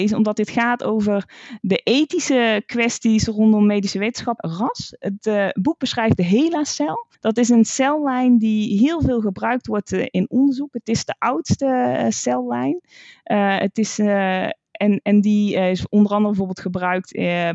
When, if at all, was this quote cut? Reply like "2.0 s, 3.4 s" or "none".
4.4 s, 7.1 s